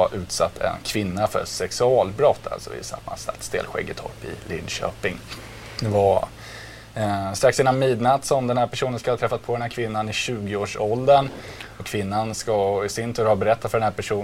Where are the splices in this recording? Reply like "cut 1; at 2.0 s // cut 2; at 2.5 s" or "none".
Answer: none